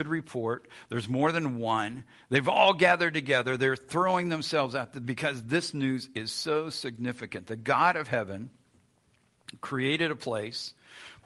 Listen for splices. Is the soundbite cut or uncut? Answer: uncut